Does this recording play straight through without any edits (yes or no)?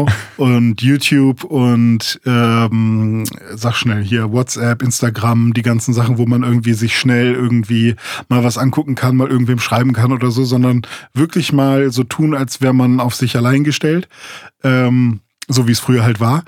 yes